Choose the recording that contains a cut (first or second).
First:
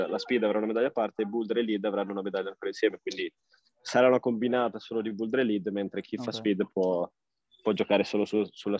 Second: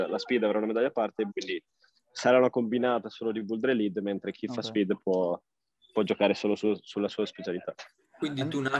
second